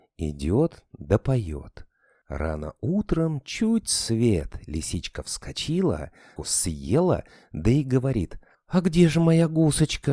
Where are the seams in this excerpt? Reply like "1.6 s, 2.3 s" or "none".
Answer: 2.2 s, 6.4 s